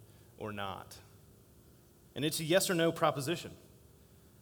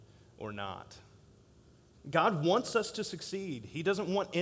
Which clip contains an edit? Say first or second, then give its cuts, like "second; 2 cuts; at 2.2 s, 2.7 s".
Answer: second; 1 cut; at 1.9 s